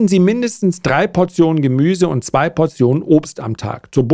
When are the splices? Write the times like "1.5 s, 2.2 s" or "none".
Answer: none